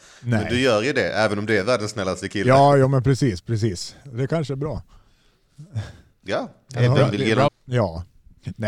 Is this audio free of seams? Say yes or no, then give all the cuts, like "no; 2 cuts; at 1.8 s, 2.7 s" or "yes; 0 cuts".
no; 1 cut; at 7.5 s